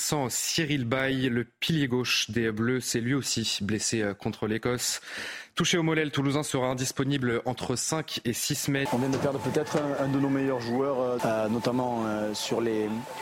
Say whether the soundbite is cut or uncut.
cut